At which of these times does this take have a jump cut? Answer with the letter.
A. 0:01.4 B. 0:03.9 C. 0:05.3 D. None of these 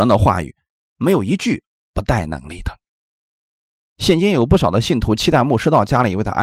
B